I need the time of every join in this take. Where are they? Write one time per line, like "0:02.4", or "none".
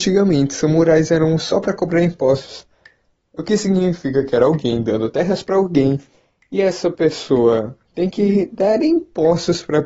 0:03.2